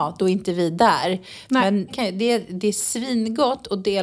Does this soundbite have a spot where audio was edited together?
yes; 1 cut; at 1.9 s

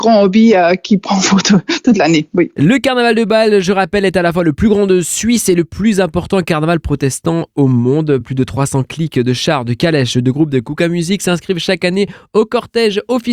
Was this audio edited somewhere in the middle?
no; 0 cuts

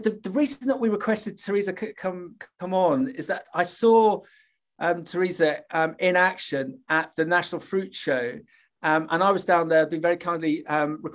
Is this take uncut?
yes; 0 cuts

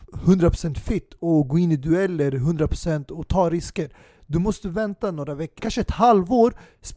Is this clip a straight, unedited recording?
no; 1 cut; at 5.6 s

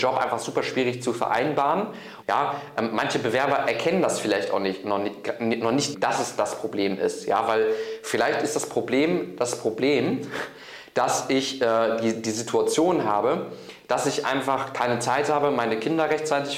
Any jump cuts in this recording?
yes; 2 cuts; at 2.2 s, 5.9 s

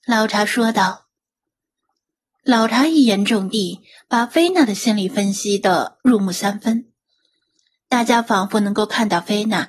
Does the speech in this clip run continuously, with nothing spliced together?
yes; 0 cuts

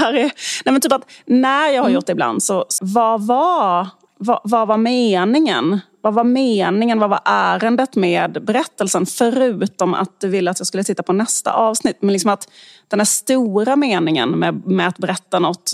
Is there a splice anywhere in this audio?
yes; 1 cut; at 2.8 s

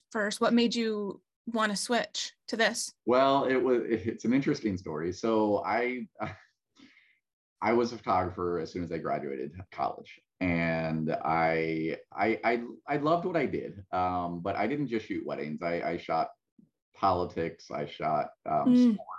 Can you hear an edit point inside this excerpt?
yes; 1 cut; at 3.0 s

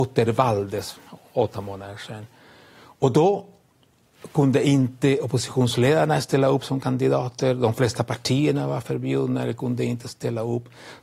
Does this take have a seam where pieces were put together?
no; 0 cuts

